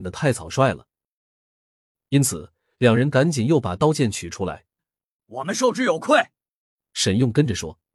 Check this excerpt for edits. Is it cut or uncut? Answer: cut